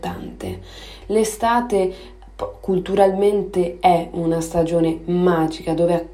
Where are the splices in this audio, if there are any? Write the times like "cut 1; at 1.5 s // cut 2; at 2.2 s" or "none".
cut 1; at 1.0 s